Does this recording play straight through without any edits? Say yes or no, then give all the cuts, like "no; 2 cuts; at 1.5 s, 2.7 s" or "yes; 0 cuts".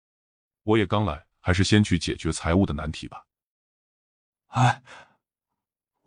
no; 1 cut; at 1.3 s